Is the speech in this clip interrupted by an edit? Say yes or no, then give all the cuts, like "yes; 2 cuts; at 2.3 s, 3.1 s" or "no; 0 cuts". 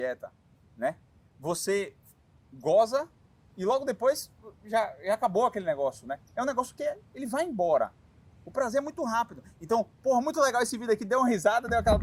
no; 0 cuts